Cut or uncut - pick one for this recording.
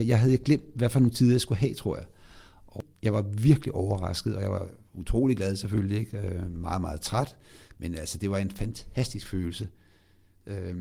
uncut